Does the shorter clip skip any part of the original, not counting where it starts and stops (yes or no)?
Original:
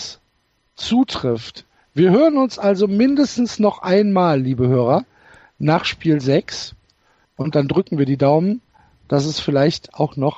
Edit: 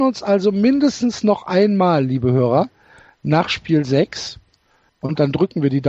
no